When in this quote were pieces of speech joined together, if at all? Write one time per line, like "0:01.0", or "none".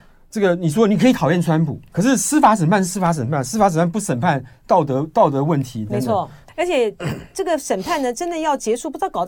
0:01.9
0:06.5